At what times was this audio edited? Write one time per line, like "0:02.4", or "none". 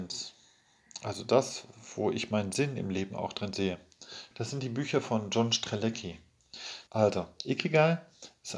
0:04.3
0:06.9